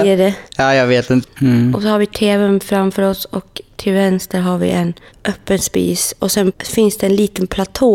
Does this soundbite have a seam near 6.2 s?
no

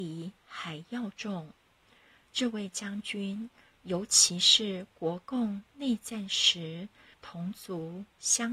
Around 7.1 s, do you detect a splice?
yes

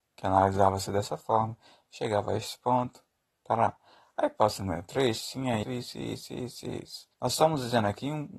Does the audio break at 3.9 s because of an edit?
no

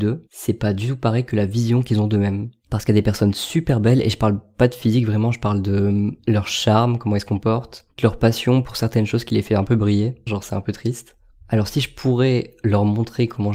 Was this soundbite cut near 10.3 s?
yes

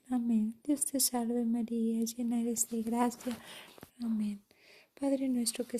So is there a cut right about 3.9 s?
yes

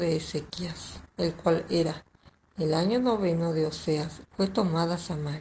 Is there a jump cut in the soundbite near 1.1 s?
no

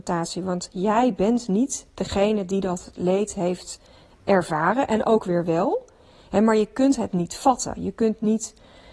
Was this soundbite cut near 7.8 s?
no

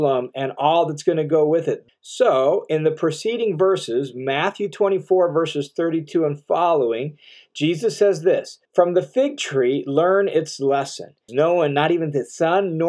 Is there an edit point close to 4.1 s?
no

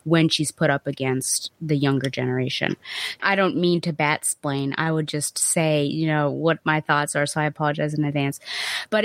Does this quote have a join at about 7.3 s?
no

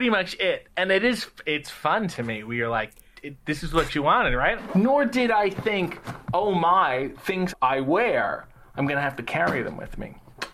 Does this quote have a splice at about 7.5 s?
yes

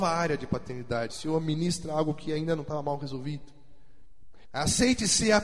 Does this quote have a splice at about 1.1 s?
yes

